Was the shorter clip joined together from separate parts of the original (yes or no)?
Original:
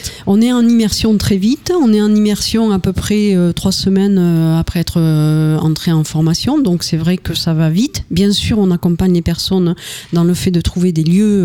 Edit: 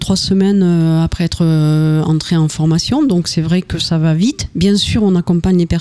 no